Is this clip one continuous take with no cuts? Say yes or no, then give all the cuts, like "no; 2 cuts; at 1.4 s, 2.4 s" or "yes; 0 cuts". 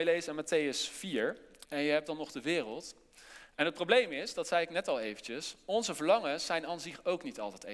no; 2 cuts; at 1.7 s, 3.5 s